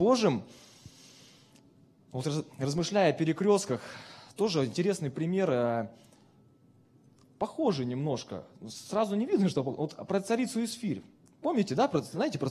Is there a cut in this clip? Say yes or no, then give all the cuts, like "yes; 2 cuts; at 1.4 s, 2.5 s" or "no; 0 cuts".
no; 0 cuts